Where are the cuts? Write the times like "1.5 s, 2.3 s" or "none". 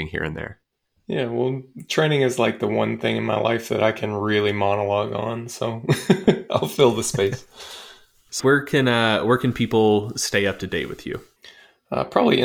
8.4 s